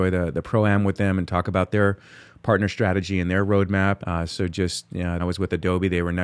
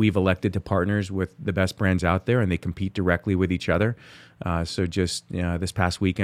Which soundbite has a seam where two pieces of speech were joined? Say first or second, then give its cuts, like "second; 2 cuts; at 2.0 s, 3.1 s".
first; 2 cuts; at 4.0 s, 5.2 s